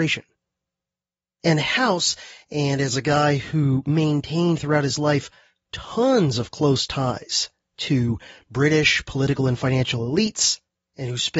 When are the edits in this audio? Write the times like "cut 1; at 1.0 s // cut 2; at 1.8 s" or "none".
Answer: cut 1; at 1.3 s // cut 2; at 2.4 s

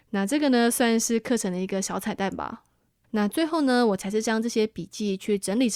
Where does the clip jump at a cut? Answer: cut 1; at 3.0 s

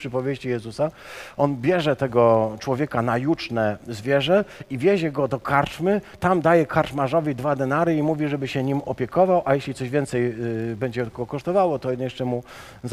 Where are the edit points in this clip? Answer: none

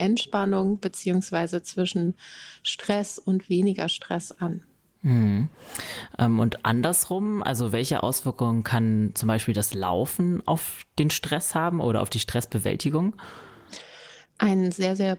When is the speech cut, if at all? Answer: none

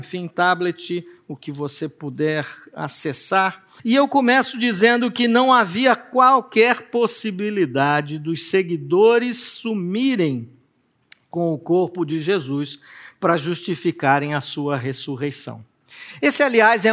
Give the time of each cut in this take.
cut 1; at 3.8 s

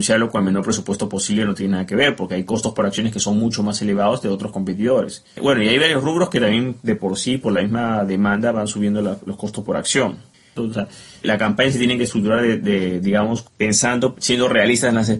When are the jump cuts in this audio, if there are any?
cut 1; at 10.6 s // cut 2; at 14.1 s

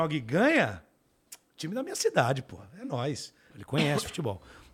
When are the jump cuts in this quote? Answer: cut 1; at 3.5 s

